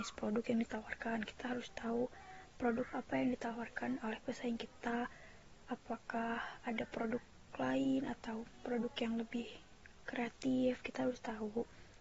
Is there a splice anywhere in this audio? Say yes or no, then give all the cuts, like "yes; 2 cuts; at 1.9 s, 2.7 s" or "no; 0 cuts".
no; 0 cuts